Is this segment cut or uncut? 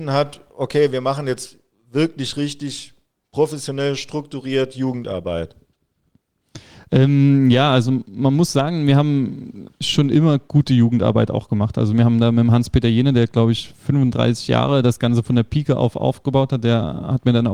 uncut